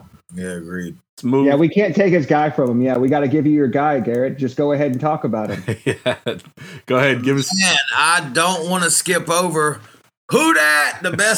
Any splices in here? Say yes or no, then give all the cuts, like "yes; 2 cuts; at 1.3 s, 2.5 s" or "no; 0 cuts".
no; 0 cuts